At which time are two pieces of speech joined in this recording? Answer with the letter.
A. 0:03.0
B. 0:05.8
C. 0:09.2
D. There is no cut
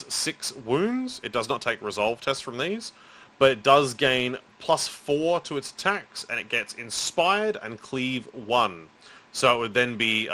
D